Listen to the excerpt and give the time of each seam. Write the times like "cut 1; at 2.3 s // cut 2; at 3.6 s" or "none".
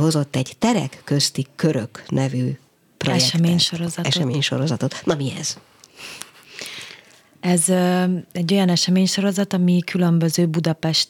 none